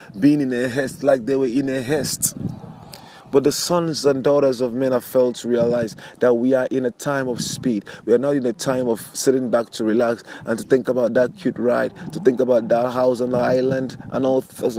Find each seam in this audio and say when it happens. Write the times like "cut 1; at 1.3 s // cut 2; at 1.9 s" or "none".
none